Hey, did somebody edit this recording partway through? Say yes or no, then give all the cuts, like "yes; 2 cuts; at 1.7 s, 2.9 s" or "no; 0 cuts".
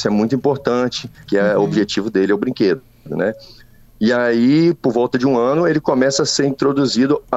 yes; 1 cut; at 1.3 s